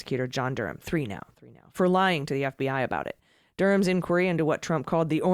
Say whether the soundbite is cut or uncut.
uncut